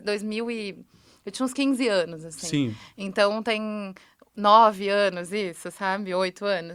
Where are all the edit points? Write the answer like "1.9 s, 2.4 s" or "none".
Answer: none